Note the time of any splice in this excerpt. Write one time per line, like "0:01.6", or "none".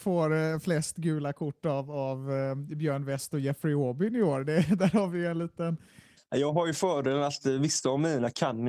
0:06.2